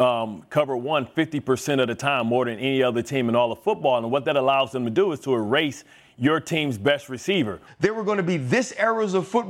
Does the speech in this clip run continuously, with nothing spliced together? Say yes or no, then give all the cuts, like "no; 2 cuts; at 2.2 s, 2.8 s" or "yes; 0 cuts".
no; 1 cut; at 7.7 s